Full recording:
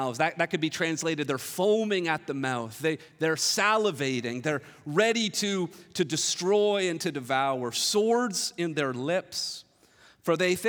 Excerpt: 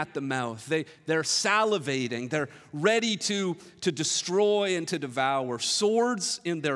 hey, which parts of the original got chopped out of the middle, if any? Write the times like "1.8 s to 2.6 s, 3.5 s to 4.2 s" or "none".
none